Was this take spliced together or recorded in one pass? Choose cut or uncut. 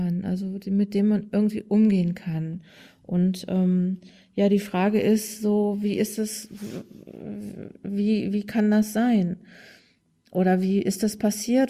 uncut